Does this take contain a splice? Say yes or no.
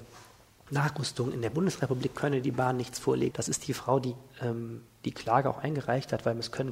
yes